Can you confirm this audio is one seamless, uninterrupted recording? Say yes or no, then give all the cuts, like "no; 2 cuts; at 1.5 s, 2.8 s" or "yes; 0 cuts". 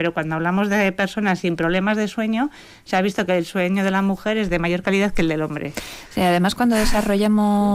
yes; 0 cuts